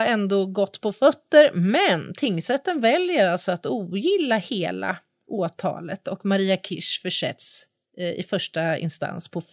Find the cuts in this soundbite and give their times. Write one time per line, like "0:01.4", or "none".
none